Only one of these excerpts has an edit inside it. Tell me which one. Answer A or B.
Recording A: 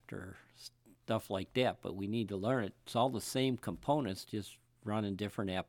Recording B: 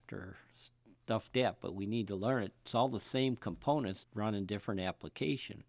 B